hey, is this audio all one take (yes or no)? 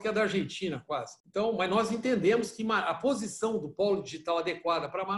no